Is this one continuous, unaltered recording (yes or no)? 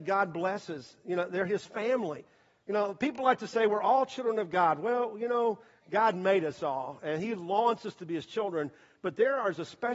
yes